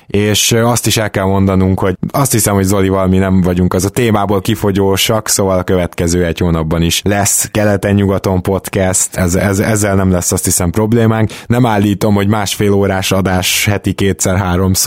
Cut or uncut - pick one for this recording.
uncut